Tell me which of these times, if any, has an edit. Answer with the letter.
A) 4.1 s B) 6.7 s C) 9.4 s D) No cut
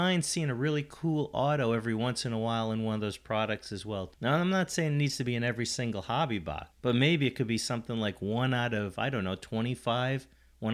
D